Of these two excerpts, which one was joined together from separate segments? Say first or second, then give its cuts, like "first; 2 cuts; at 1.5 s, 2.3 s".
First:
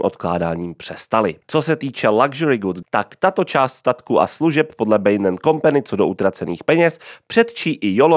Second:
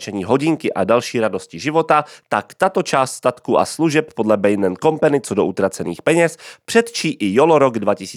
first; 2 cuts; at 1.4 s, 2.8 s